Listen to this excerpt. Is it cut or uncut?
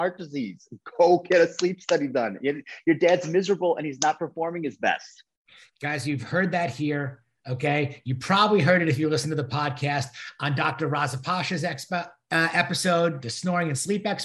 uncut